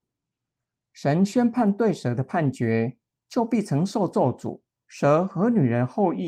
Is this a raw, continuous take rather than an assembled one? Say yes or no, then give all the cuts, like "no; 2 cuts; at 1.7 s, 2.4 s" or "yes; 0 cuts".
no; 2 cuts; at 3.2 s, 4.8 s